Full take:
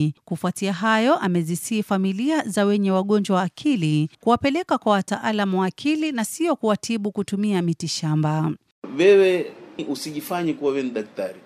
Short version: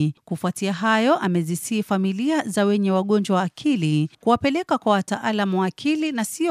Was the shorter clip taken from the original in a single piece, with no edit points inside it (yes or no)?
yes